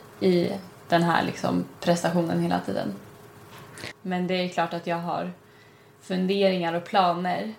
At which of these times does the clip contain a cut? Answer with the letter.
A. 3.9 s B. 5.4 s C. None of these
A